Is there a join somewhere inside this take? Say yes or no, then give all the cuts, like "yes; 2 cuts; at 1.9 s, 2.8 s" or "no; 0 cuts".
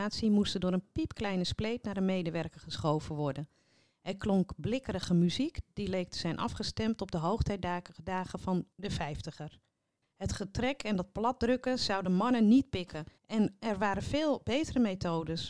yes; 2 cuts; at 10.0 s, 13.2 s